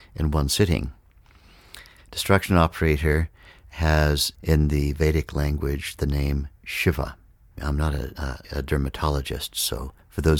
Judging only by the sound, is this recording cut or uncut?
cut